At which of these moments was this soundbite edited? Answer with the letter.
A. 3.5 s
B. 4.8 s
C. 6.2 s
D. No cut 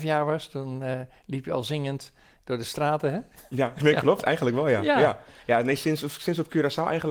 D